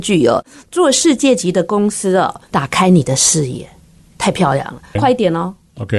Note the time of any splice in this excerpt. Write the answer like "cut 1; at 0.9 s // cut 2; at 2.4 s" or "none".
cut 1; at 5.0 s